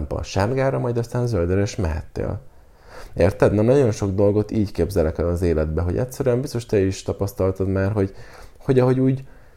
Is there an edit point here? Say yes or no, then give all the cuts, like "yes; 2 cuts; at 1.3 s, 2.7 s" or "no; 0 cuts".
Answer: no; 0 cuts